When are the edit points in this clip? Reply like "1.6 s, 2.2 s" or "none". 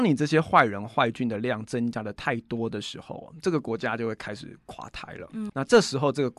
5.5 s

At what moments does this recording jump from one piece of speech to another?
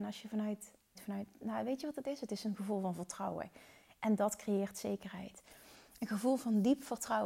0.9 s

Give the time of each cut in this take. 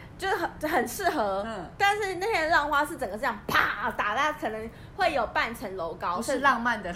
none

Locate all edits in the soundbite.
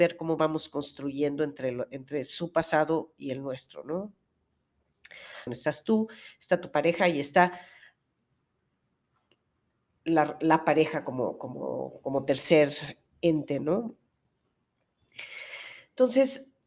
5.5 s

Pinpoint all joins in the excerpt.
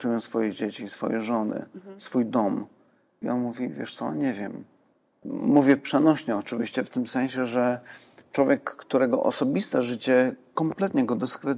3.2 s, 5.2 s

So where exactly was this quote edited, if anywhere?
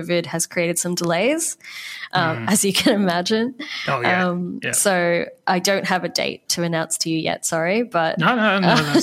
none

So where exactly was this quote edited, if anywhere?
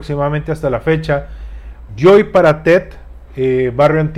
1.9 s, 3.3 s

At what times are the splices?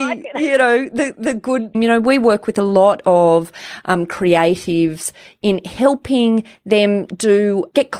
1.7 s

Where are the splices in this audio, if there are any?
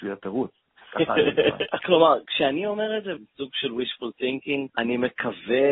1.8 s, 3.2 s, 4.7 s

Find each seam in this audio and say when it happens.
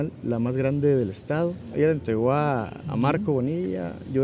1.7 s

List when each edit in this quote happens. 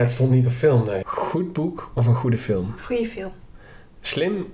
1.0 s

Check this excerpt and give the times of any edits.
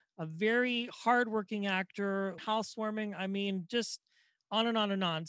2.4 s

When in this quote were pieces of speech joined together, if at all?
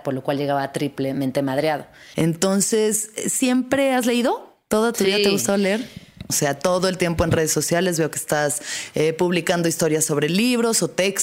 2.1 s, 6.3 s

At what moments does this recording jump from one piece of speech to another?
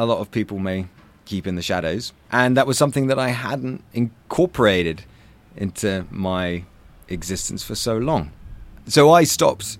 8.8 s

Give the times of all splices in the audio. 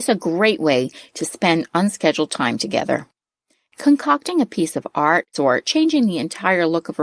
5.3 s

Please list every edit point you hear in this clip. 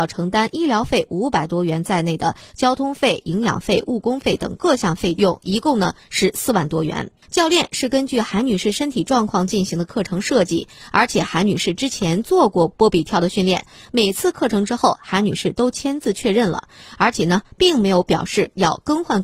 7.2 s

